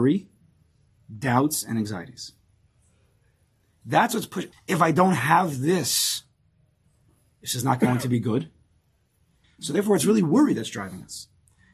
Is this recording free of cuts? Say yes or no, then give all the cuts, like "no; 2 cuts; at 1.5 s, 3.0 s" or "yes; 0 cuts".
no; 2 cuts; at 4.5 s, 9.4 s